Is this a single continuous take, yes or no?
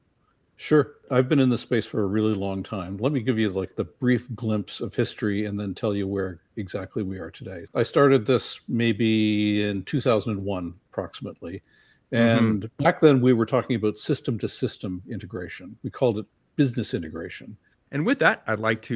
no